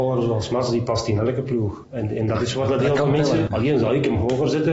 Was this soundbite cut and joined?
yes; 2 cuts; at 1.8 s, 3.5 s

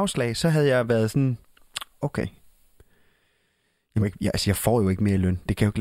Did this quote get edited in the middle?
yes; 1 cut; at 4.0 s

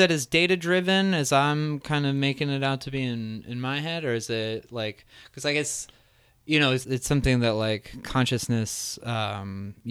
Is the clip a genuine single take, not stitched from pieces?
no; 1 cut; at 6.8 s

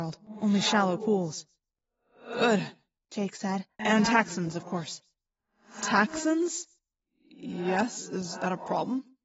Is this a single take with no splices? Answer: no; 1 cut; at 3.8 s

